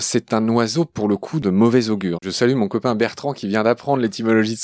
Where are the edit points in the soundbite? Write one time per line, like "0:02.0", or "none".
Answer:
0:02.2